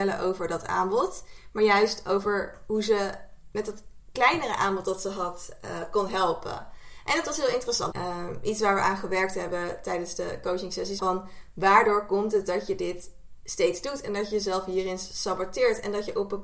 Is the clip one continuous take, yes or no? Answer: no